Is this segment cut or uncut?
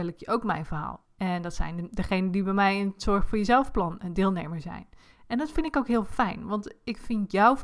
cut